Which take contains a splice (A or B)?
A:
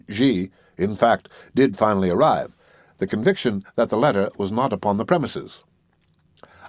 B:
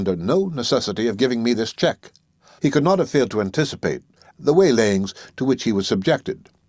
B